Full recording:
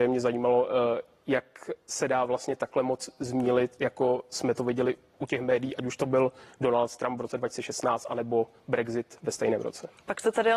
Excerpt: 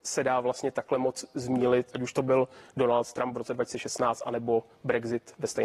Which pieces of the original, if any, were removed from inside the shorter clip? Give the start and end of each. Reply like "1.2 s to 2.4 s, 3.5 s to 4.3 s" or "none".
3.8 s to 5.8 s